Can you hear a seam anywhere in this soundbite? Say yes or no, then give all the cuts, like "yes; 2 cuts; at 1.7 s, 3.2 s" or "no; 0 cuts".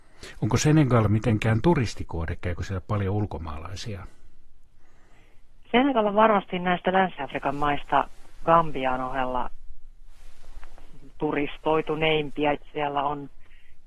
yes; 1 cut; at 12.5 s